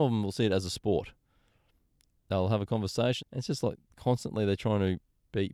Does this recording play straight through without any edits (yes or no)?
no